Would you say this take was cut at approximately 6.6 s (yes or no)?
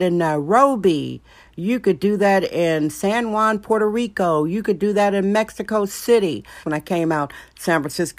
yes